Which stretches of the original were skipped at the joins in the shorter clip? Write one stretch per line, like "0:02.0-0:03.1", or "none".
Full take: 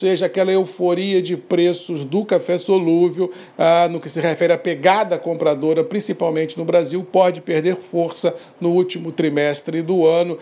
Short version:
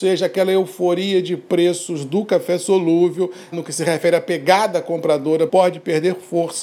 0:03.5-0:03.9
0:05.8-0:07.1